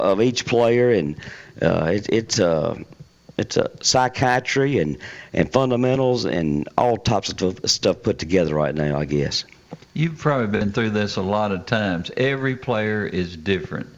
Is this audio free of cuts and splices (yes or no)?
yes